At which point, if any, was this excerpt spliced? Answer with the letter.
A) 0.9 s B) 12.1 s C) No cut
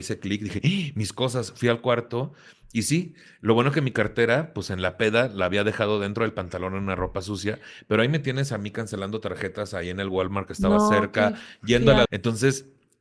B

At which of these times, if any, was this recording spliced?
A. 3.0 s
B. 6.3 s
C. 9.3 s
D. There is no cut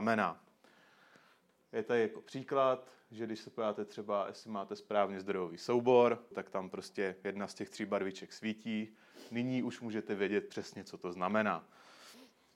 B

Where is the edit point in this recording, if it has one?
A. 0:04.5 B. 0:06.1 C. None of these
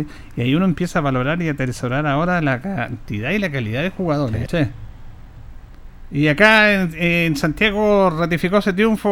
A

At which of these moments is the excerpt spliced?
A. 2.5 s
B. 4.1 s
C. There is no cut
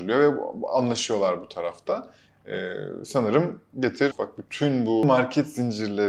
B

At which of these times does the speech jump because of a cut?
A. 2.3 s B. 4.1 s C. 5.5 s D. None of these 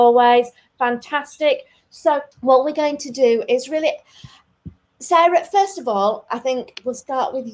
A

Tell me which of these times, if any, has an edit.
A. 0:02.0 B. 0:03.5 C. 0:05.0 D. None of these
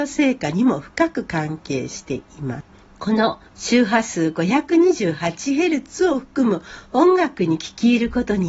B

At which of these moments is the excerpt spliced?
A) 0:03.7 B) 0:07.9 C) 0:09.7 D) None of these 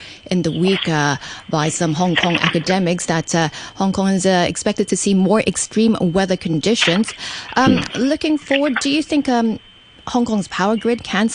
D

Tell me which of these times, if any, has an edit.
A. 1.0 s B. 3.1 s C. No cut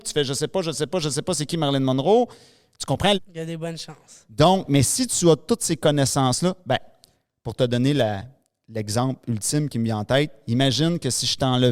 B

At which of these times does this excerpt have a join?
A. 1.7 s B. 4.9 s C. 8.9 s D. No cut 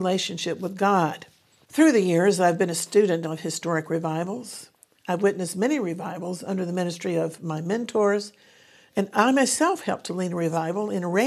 A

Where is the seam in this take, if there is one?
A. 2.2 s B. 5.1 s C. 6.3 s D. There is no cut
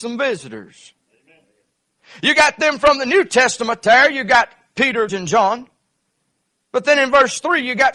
B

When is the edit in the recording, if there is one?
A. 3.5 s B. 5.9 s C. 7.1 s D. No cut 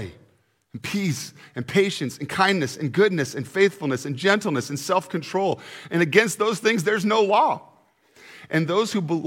D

